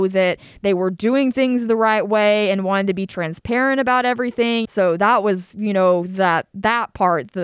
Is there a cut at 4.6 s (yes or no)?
yes